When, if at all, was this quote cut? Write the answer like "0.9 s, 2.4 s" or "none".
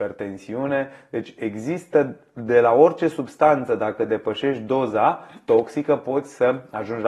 none